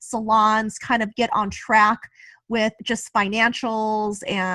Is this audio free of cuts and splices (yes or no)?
yes